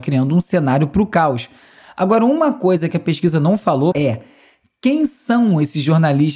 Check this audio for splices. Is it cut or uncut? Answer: cut